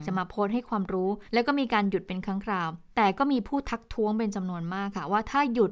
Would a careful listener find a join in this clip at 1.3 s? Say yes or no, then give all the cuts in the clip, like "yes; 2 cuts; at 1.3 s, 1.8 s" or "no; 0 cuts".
yes; 1 cut; at 1.3 s